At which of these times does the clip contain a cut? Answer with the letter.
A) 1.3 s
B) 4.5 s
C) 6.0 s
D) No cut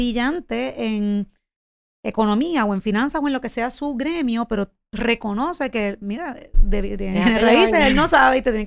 D